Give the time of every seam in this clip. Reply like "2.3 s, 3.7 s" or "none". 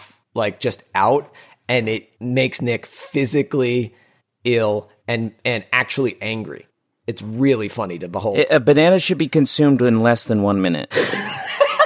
none